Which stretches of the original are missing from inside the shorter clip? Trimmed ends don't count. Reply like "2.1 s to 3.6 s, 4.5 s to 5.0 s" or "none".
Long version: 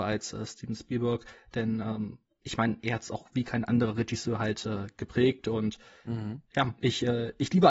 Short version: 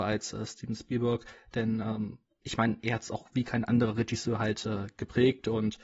none